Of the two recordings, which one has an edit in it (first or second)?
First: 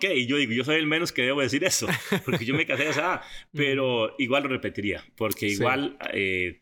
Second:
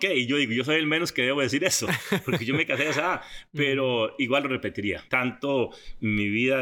second